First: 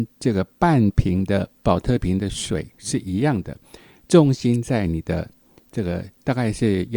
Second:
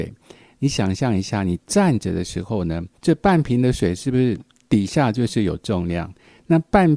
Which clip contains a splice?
second; 1 cut; at 3.0 s

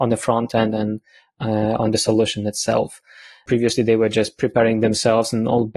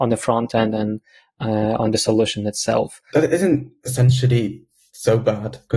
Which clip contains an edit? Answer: second; 1 cut; at 3.1 s

